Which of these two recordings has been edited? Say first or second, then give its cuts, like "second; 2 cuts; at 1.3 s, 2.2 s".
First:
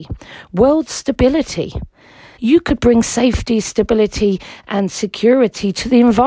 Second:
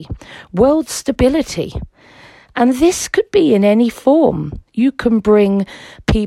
first; 1 cut; at 2.4 s